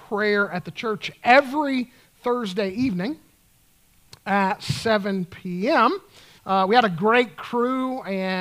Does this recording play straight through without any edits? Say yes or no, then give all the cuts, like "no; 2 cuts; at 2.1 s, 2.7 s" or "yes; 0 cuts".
no; 1 cut; at 6.4 s